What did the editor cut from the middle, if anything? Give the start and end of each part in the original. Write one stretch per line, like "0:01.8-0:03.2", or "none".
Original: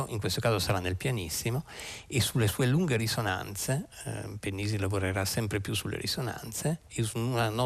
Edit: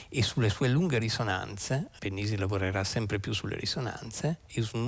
0:04.0-0:04.4